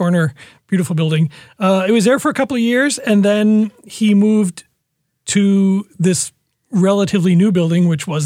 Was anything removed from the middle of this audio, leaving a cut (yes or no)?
yes